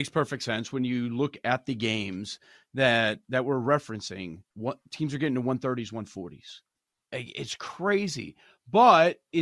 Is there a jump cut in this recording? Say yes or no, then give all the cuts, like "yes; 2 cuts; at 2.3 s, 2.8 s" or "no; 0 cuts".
yes; 1 cut; at 4.5 s